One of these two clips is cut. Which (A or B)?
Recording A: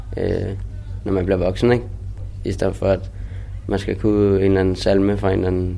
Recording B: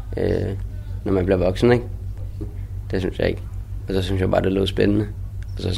B